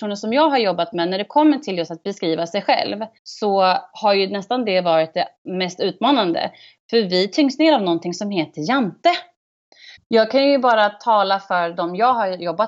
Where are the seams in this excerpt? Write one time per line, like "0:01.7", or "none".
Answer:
0:03.2
0:10.0